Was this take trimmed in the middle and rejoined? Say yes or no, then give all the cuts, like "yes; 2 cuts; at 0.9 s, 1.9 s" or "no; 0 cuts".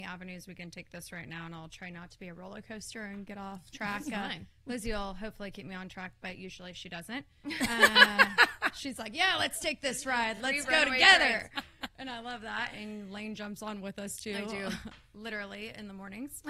no; 0 cuts